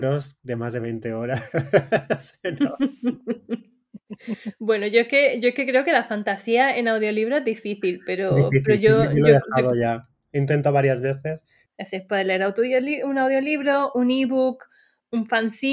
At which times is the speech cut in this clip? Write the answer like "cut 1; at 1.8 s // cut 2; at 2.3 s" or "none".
cut 1; at 11.7 s